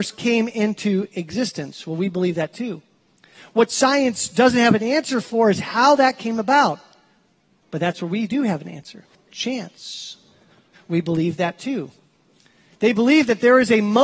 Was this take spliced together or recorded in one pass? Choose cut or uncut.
cut